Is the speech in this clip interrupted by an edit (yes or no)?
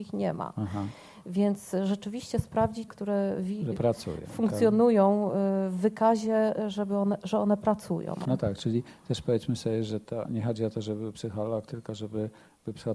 yes